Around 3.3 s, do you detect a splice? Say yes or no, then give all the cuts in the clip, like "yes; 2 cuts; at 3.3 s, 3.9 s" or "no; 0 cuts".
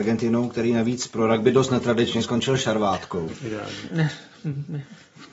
yes; 1 cut; at 3.3 s